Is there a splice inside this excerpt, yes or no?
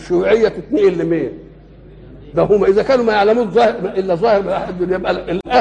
yes